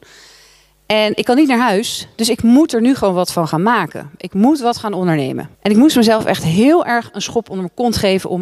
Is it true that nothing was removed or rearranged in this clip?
no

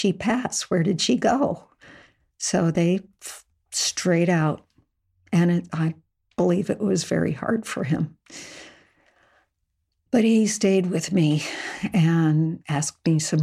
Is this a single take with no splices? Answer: yes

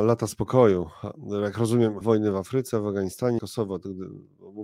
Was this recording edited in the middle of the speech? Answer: yes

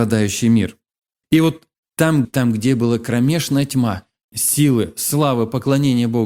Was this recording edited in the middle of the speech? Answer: yes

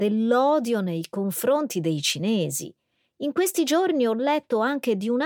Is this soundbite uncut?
yes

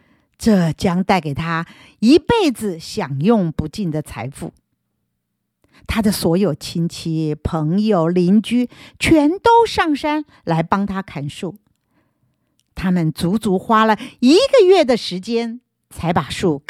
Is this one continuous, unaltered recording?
yes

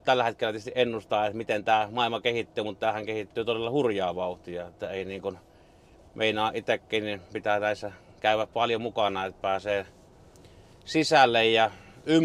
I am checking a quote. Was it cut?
no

